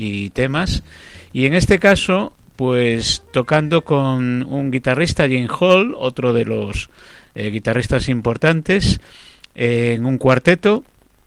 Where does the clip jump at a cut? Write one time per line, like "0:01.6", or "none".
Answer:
none